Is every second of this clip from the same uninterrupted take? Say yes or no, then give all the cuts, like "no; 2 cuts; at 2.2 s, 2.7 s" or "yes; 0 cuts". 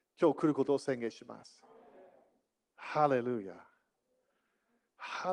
no; 1 cut; at 2.7 s